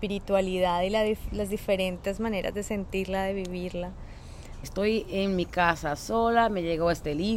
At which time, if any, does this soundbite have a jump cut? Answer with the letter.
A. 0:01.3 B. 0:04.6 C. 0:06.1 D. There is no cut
B